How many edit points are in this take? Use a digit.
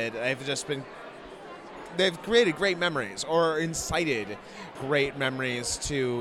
1